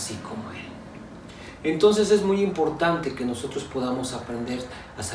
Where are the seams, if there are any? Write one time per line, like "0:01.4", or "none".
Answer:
none